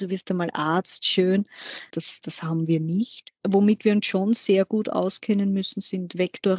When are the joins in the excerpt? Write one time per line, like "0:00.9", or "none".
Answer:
0:01.9